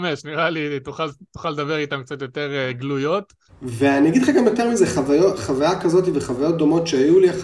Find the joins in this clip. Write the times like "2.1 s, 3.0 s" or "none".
3.5 s